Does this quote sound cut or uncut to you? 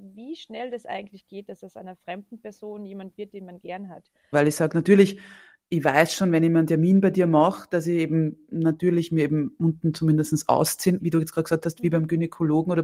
cut